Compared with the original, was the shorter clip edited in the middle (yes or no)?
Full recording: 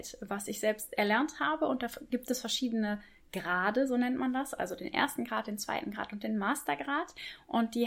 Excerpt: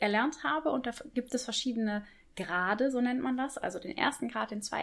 no